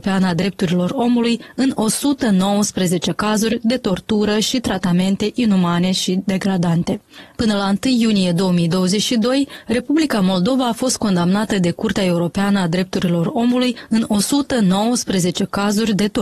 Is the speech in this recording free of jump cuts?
yes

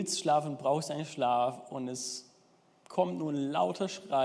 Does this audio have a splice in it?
no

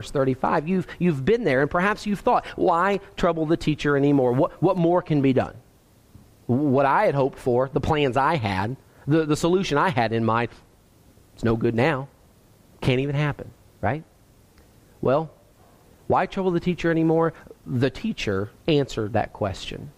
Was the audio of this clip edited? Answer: no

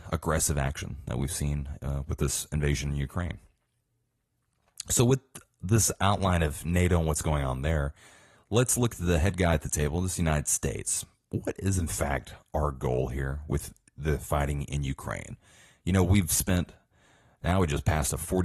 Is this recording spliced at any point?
no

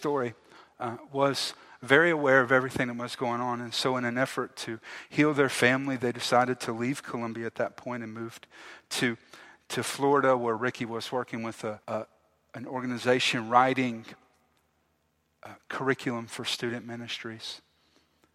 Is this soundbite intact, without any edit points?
no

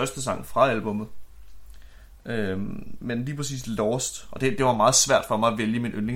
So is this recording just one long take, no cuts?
no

